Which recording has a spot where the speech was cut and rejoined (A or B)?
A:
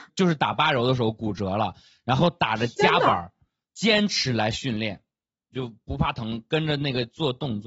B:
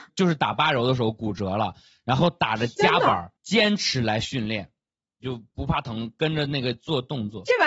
B